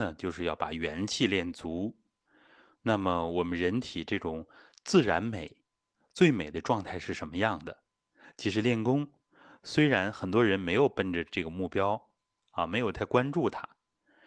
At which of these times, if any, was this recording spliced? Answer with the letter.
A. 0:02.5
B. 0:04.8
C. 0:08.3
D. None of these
D